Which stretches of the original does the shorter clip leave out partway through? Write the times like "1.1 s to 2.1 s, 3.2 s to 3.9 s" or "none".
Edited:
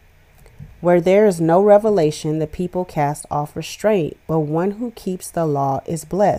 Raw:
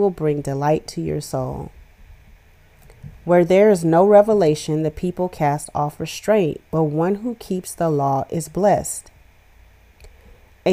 none